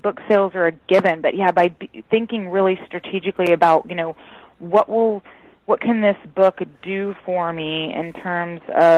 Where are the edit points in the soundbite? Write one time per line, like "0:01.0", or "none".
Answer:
none